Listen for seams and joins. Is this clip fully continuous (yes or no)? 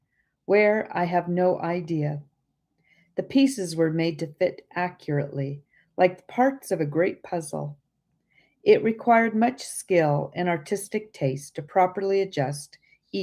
yes